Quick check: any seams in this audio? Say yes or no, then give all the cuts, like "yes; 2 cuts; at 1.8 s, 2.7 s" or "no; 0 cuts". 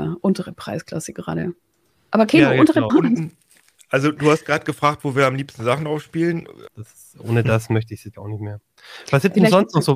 yes; 3 cuts; at 2.9 s, 6.7 s, 8.1 s